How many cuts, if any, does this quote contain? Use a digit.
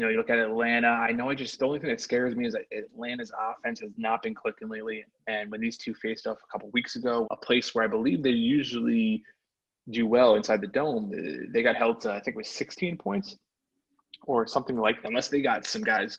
2